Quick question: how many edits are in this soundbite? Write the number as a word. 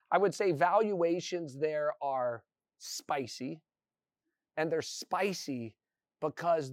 zero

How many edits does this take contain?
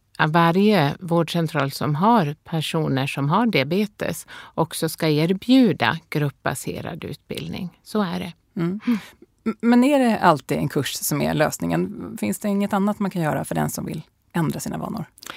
zero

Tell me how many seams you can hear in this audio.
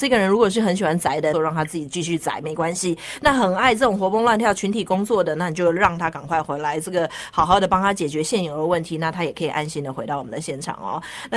one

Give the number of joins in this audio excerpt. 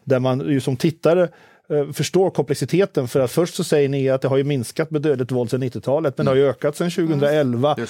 zero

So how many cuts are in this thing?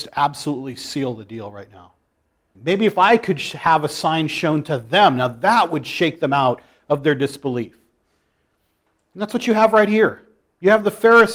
one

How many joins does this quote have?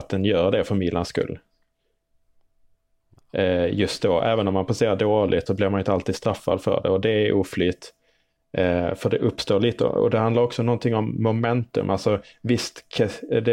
one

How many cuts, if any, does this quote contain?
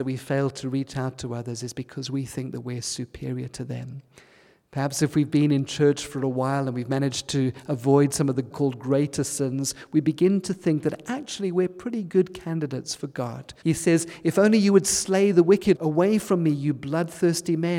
three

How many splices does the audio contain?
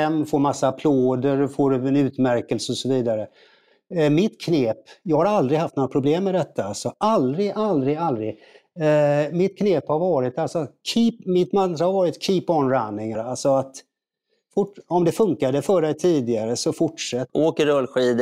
two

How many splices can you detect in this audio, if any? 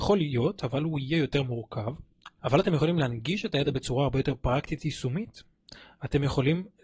one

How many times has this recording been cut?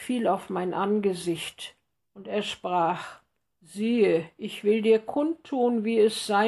one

